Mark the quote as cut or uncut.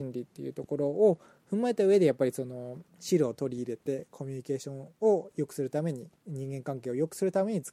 cut